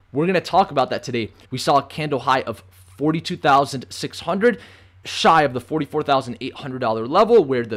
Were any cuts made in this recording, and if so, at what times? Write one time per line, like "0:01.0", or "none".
0:01.4
0:05.0